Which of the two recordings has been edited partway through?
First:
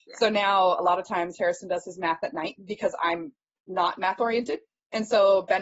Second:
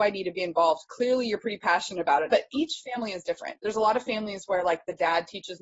second; 1 cut; at 2.3 s

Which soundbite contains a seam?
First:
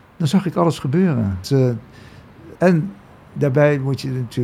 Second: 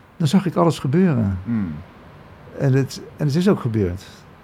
first; 2 cuts; at 1.4 s, 2.5 s

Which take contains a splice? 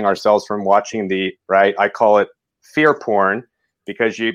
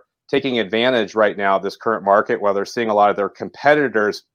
first; 1 cut; at 1.3 s

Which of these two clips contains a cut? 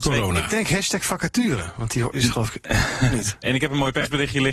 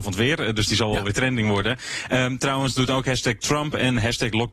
first; 2 cuts; at 2.1 s, 3.4 s

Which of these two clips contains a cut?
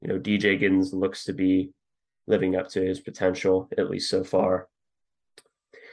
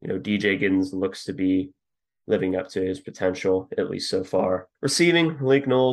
second; 1 cut; at 4.7 s

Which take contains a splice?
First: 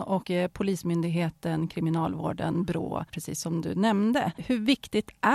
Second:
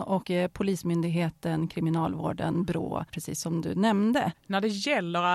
second; 1 cut; at 4.3 s

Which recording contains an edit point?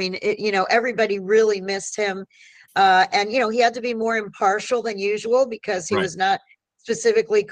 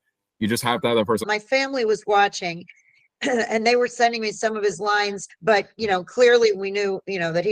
second; 3 cuts; at 1.2 s, 5.3 s, 6.5 s

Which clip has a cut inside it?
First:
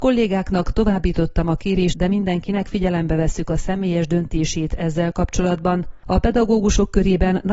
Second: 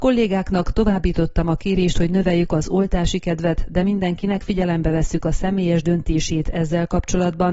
first; 1 cut; at 1.9 s

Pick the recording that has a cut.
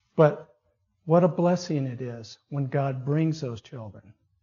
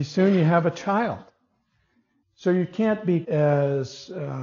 second; 2 cuts; at 2.2 s, 3.2 s

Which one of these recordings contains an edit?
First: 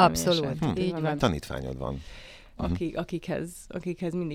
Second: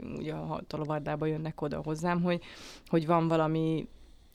first; 2 cuts; at 1.2 s, 2.6 s

